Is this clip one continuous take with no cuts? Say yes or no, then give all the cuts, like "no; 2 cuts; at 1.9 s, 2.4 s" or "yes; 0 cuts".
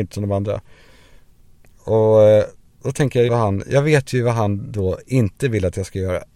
no; 1 cut; at 3.3 s